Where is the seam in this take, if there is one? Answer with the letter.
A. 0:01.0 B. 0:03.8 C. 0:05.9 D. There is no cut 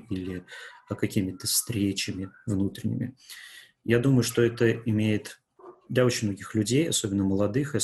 C